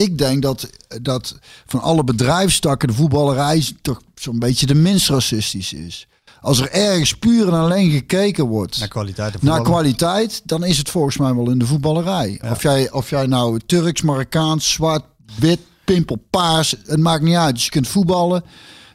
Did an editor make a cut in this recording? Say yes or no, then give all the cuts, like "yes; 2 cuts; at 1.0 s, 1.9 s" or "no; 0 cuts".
no; 0 cuts